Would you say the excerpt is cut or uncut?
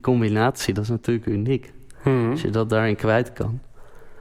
uncut